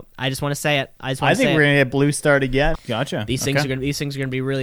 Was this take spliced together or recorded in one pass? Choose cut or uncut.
cut